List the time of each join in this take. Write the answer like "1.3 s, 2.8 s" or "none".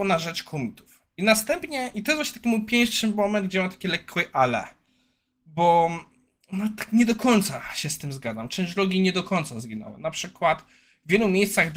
none